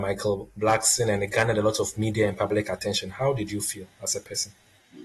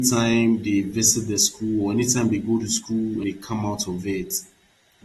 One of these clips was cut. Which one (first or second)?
second